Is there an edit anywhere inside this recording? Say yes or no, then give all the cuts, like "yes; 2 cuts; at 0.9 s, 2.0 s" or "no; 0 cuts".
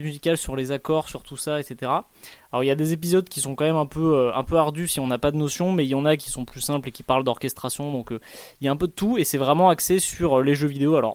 no; 0 cuts